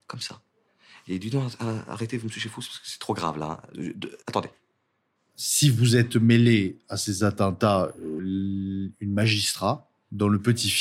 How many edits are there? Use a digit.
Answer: 2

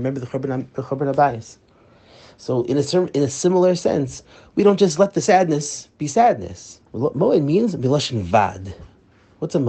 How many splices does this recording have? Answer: 1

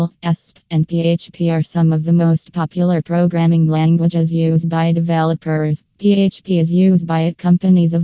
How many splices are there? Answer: 1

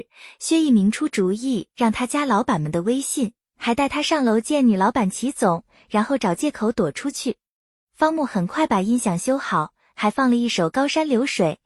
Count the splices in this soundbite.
0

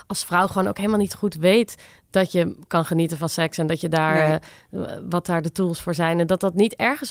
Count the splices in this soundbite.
0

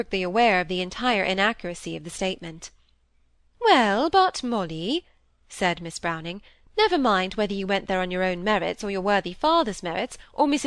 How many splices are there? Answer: 0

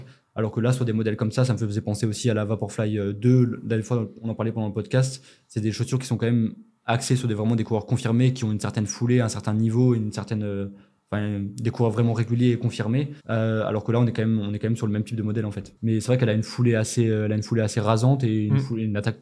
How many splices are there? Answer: 2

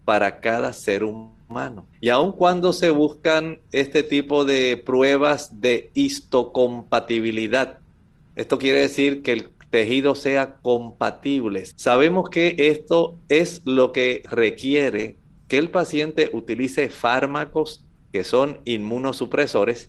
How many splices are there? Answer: 3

